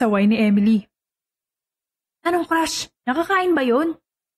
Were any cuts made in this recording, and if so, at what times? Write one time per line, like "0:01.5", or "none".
0:03.0